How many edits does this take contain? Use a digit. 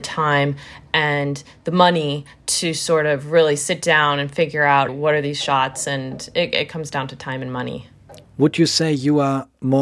2